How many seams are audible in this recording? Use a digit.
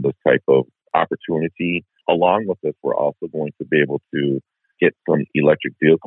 0